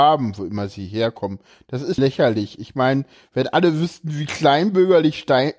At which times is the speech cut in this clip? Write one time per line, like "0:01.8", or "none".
0:02.0